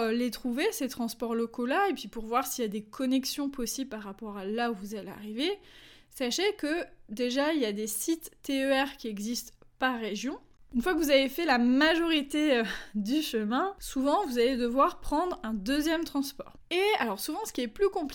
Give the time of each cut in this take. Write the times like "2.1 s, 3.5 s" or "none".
10.6 s, 16.6 s